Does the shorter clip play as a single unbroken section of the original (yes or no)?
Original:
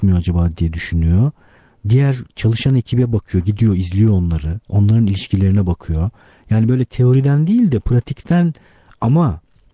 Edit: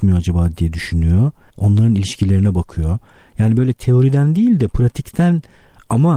no